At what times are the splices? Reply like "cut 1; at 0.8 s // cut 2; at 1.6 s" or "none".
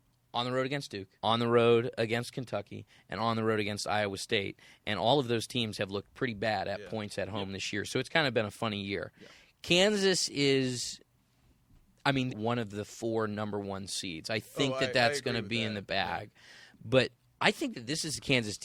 cut 1; at 1.2 s // cut 2; at 12.3 s